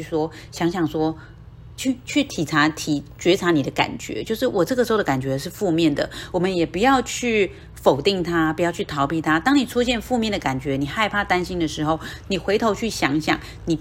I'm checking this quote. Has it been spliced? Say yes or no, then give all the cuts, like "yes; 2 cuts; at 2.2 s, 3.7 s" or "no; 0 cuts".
no; 0 cuts